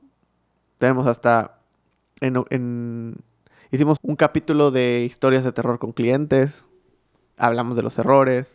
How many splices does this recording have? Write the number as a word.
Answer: one